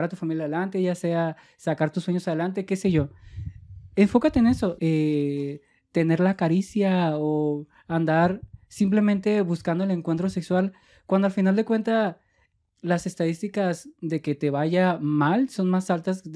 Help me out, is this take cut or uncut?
cut